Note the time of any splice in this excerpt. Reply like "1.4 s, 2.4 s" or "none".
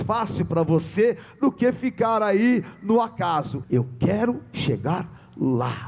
3.6 s